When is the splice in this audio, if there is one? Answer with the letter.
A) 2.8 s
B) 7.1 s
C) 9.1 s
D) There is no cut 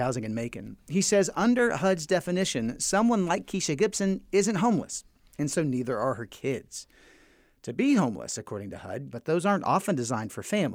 C